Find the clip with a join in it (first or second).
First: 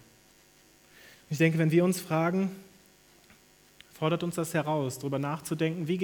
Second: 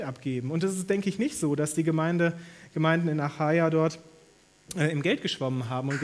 first